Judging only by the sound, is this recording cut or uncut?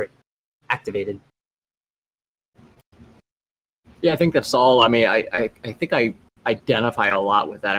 uncut